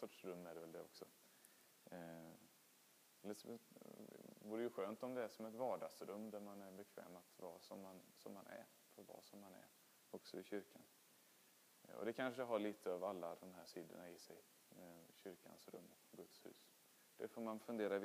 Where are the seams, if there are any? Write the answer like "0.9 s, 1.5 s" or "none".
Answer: none